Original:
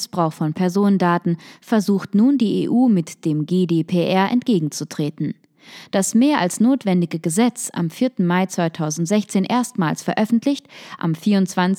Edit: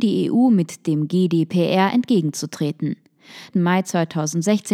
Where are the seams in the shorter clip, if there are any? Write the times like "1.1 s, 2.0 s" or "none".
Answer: 3.5 s